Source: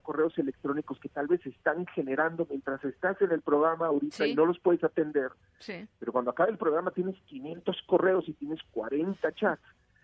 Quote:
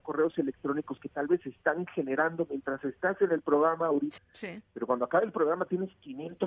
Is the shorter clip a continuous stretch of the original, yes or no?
no